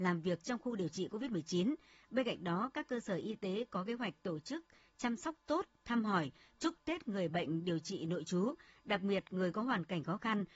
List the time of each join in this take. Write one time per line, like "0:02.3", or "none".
none

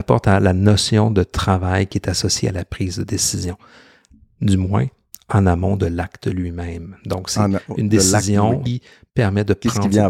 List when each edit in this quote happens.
0:08.7

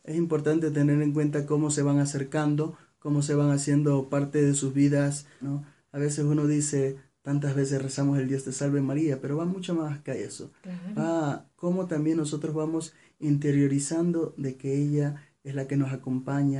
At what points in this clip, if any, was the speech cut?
0:05.4

